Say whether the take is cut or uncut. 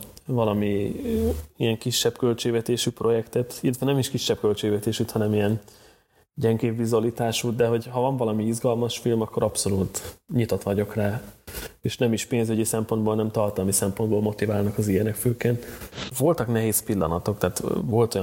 cut